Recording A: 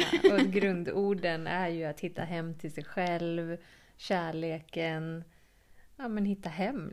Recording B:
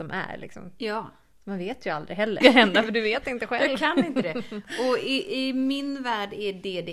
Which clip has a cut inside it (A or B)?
B